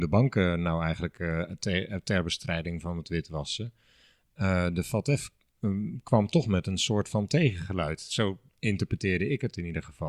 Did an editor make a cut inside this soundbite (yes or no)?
no